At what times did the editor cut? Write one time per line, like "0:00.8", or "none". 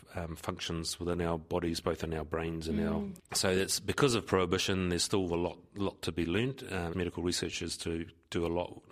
0:03.2
0:06.9

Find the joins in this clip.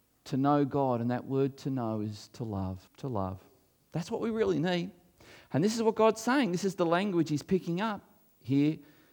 0:02.9

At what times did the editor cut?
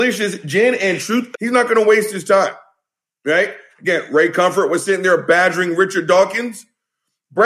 0:01.3

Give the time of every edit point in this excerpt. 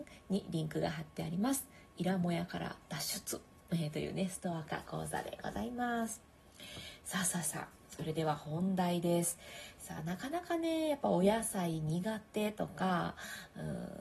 none

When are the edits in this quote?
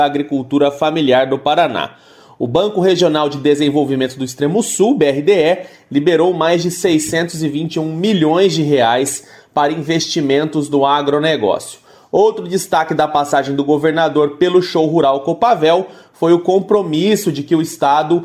none

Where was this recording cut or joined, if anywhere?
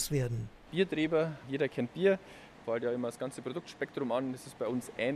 0:02.6

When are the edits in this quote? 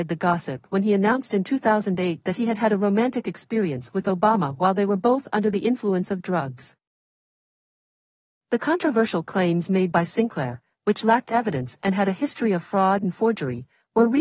none

